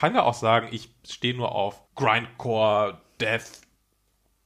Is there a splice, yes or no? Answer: yes